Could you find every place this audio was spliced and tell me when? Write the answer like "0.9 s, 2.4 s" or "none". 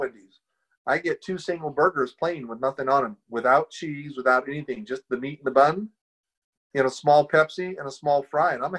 none